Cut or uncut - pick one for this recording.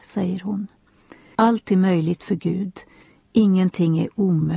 cut